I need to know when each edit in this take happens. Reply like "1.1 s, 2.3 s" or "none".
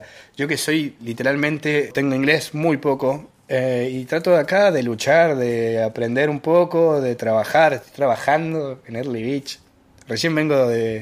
none